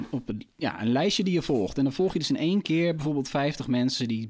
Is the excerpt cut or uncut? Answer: uncut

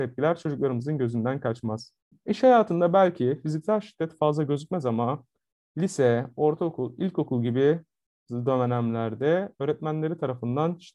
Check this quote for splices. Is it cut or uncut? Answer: cut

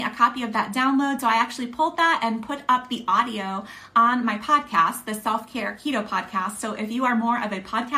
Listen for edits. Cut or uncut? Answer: uncut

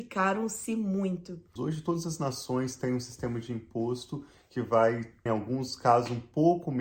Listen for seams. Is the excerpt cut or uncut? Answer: cut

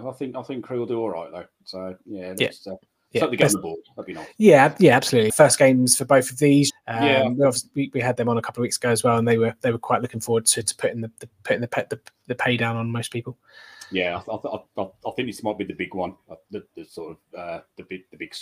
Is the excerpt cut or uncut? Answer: cut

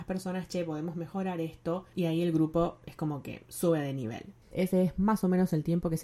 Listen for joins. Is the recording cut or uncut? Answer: cut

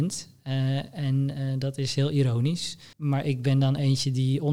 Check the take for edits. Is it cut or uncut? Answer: cut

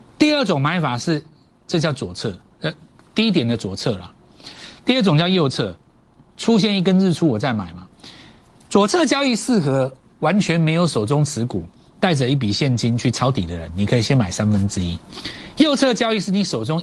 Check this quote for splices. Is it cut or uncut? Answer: uncut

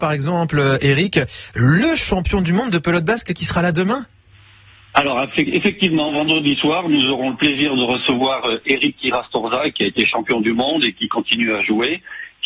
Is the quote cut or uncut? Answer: uncut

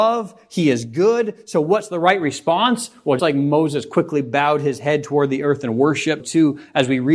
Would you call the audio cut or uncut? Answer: cut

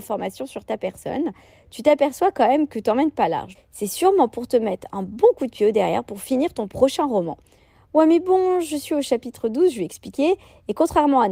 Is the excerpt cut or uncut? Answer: cut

